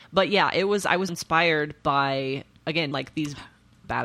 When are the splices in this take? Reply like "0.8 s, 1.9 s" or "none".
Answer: 1.1 s, 2.9 s